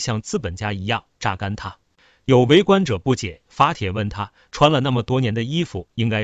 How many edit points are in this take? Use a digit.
0